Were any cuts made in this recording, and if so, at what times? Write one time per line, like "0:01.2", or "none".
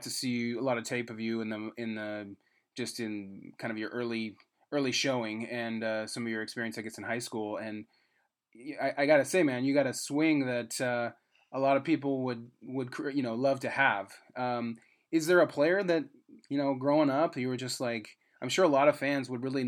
none